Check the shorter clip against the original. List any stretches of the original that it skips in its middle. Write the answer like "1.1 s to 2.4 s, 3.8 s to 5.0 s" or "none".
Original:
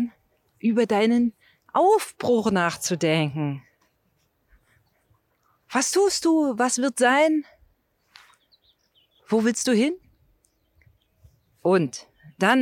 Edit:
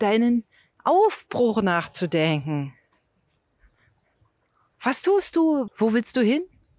6.6 s to 9.2 s